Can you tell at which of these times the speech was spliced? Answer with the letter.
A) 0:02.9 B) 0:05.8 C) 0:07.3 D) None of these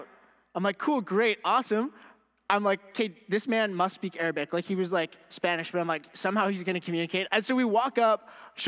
C